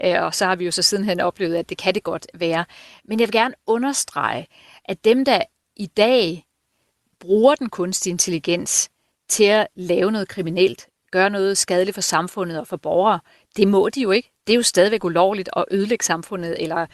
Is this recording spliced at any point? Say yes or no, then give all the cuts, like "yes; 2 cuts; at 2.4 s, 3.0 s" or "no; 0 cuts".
no; 0 cuts